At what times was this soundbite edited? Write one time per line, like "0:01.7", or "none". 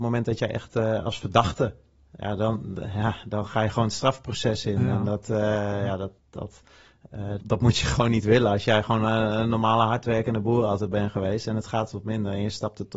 0:06.2
0:07.4